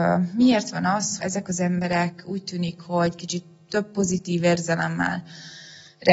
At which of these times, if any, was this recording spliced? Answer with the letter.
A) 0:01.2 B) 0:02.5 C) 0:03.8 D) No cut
A